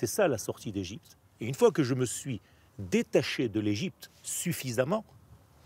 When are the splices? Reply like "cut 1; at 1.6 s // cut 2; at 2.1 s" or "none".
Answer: none